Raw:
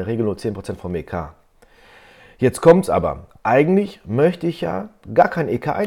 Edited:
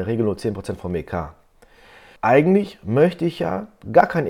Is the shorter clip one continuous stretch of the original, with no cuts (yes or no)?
no